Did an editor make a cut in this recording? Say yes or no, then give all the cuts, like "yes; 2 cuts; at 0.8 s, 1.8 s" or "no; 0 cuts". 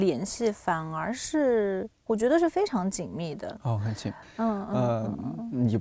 yes; 1 cut; at 4.2 s